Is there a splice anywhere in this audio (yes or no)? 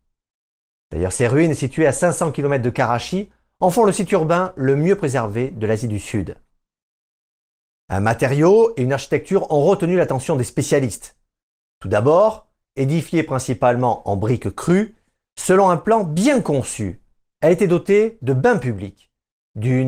no